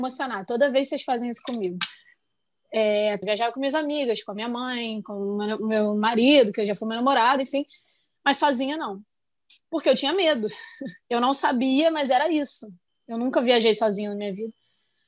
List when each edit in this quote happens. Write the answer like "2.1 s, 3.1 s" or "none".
3.2 s, 11.0 s, 12.9 s